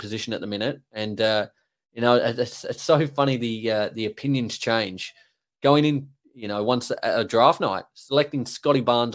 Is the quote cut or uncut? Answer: uncut